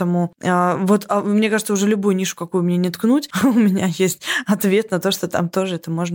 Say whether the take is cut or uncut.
uncut